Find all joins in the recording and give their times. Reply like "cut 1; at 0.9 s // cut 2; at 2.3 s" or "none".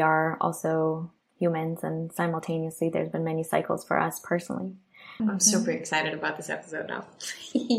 cut 1; at 5.2 s